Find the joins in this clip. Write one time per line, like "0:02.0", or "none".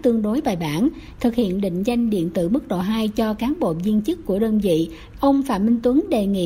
0:01.2
0:05.1